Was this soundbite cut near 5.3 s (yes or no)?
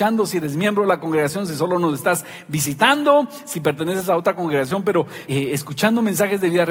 yes